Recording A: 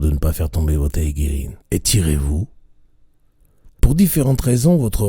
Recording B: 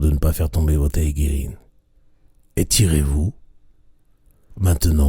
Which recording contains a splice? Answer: A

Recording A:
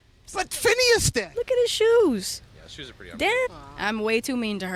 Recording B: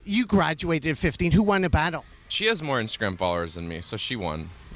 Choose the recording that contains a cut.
A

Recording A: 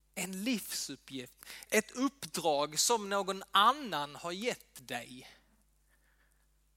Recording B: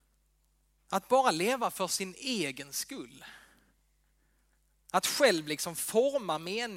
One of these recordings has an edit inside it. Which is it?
A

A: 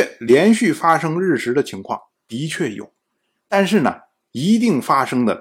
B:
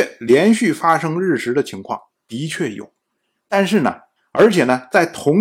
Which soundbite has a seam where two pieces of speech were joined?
B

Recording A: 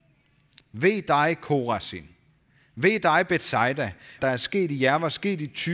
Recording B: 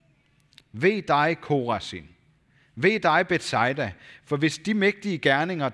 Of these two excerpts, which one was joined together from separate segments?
A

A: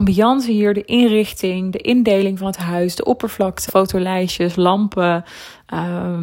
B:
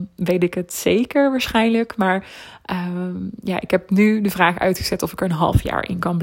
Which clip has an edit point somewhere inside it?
A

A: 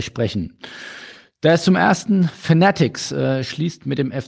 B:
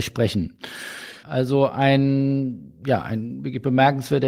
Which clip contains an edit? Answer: B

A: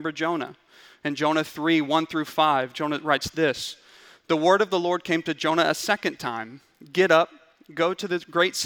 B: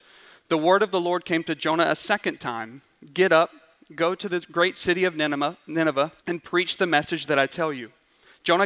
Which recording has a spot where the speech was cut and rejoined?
B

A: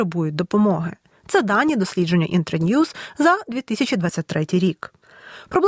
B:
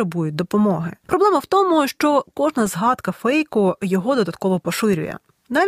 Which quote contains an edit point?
B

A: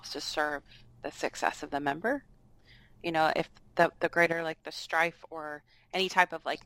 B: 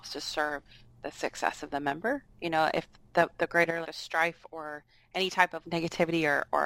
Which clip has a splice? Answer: B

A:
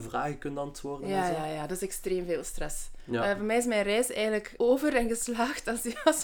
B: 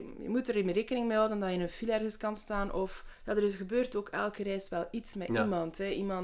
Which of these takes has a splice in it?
A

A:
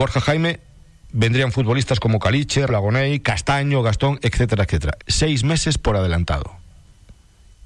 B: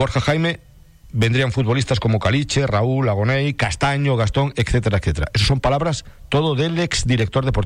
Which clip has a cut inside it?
A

